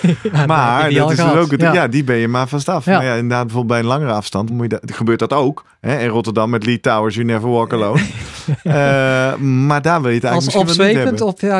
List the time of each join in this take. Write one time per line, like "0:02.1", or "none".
0:04.5